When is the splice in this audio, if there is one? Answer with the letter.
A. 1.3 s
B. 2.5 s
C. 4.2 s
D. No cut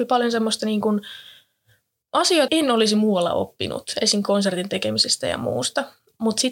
B